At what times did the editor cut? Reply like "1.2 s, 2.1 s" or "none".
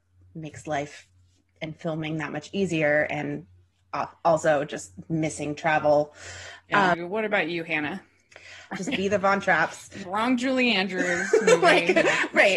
6.9 s, 8.7 s, 10.0 s